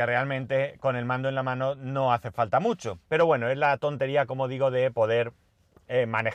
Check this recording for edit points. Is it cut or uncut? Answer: cut